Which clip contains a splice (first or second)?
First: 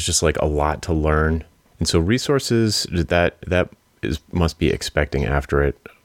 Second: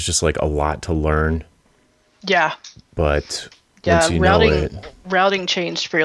first